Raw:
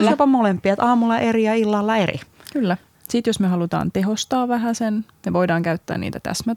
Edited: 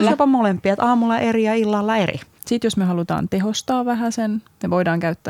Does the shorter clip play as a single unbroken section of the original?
no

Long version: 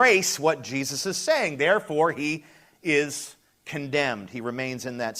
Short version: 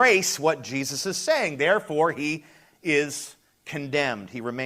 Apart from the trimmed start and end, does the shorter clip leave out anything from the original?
no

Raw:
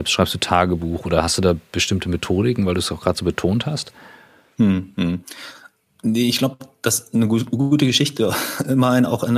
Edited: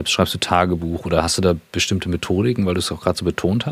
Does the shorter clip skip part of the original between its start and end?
no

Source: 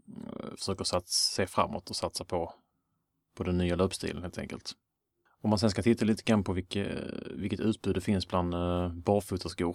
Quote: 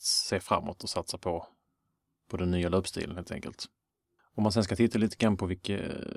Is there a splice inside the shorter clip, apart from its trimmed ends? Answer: no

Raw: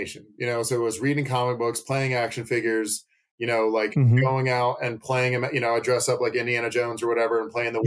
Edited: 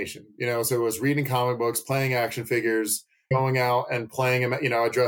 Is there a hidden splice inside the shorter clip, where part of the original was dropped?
yes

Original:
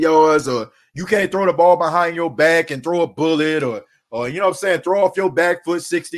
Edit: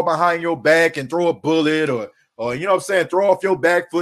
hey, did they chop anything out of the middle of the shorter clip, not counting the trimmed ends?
no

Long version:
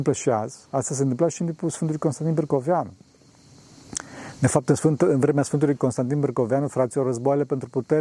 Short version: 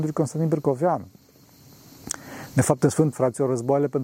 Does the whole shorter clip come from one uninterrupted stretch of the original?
no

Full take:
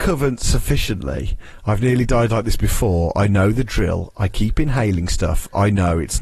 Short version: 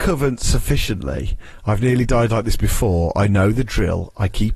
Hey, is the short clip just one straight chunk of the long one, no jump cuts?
yes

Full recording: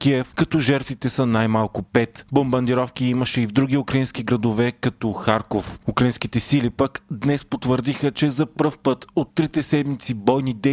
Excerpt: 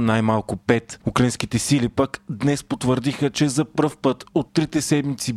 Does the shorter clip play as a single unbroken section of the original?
no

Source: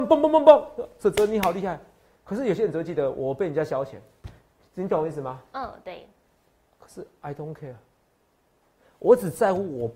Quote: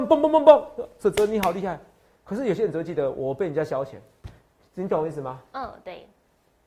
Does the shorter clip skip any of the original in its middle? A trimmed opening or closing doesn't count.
no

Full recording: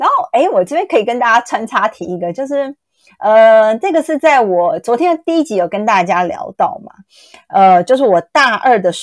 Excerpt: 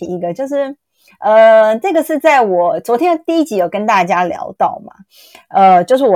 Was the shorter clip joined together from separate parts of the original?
no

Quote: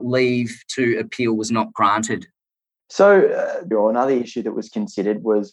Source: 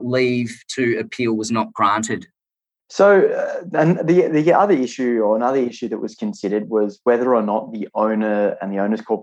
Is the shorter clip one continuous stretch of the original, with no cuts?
no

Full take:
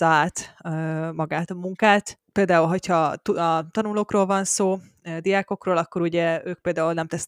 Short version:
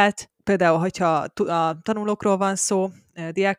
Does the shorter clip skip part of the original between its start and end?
no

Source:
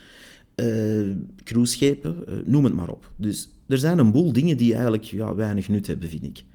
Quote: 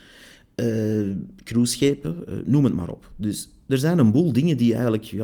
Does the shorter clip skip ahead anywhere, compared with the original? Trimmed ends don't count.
no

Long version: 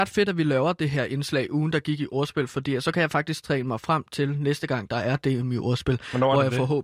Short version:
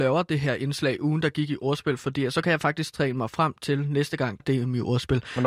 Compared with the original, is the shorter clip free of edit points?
no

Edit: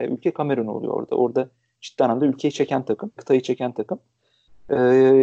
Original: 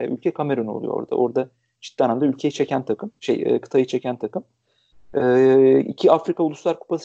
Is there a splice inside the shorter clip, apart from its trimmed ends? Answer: yes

